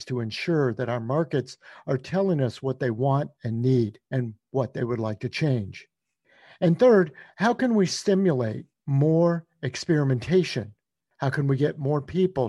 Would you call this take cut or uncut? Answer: uncut